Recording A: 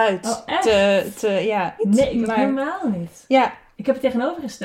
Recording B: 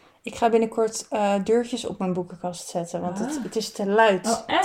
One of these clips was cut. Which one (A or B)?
A